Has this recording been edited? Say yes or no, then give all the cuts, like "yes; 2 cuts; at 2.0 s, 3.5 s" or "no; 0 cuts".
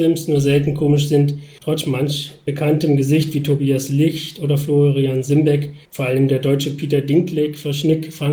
yes; 2 cuts; at 1.6 s, 5.9 s